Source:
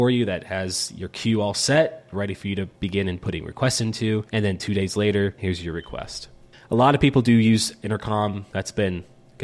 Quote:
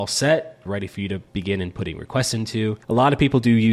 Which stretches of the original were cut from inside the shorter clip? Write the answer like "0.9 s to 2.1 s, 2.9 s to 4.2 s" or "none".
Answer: 4.3 s to 6.6 s